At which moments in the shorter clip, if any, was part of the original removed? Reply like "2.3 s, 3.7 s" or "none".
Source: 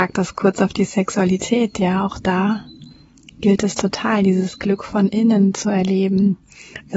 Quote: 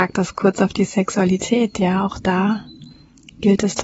none